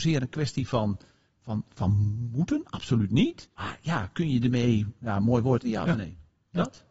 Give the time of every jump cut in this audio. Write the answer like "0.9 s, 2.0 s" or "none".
3.5 s, 5.6 s